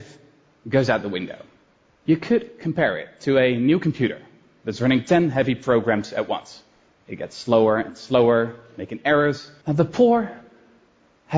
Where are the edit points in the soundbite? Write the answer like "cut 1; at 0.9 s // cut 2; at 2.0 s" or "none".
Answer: cut 1; at 9.6 s